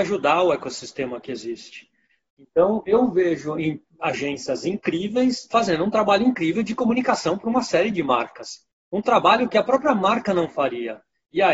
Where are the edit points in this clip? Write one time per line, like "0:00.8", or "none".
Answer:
0:02.3
0:05.5